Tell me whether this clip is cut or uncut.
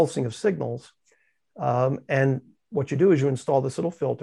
uncut